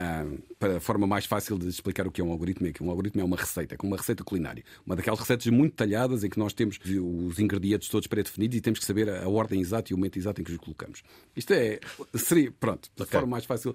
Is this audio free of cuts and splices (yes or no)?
no